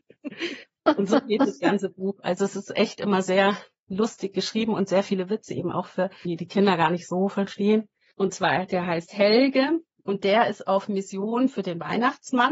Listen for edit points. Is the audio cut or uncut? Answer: cut